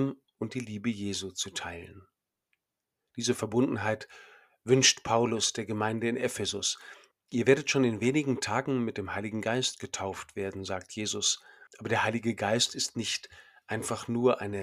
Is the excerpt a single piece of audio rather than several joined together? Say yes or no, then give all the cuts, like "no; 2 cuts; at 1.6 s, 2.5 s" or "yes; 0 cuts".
no; 2 cuts; at 7.1 s, 11.7 s